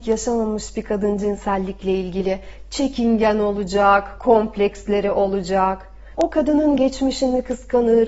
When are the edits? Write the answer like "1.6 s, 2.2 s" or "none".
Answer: 4.2 s, 6.1 s